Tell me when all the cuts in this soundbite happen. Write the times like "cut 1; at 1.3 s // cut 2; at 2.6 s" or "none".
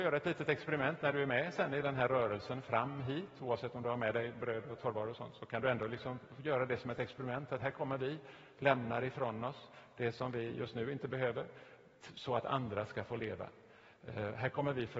none